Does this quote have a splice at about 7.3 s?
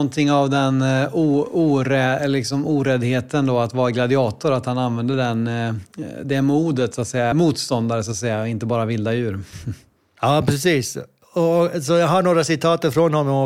yes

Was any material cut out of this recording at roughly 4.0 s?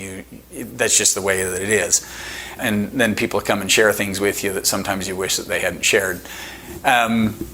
no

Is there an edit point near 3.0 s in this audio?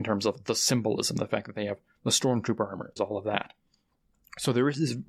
yes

